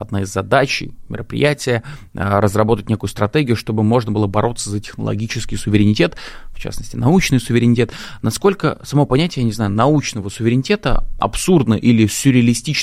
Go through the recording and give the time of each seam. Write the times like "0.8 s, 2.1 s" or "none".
none